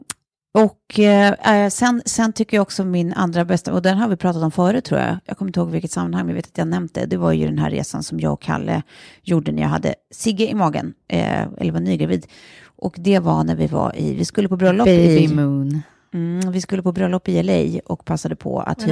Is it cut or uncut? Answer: uncut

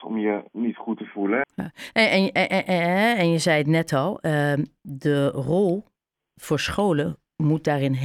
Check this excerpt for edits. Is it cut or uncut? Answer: cut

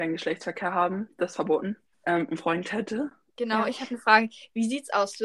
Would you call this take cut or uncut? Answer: cut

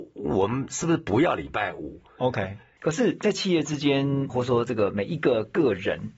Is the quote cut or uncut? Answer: cut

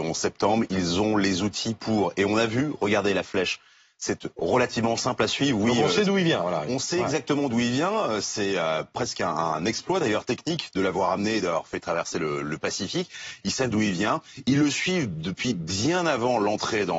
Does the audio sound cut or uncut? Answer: uncut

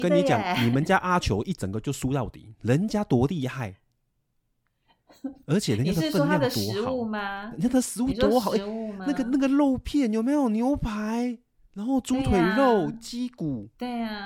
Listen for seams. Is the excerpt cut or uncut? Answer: uncut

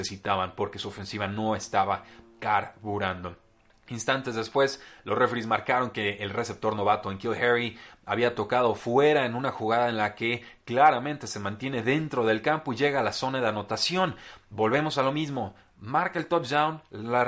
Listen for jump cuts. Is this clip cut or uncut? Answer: uncut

